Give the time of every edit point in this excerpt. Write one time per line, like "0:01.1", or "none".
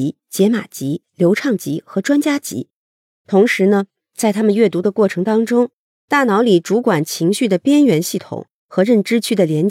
0:03.2